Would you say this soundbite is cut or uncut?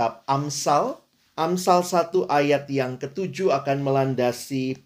cut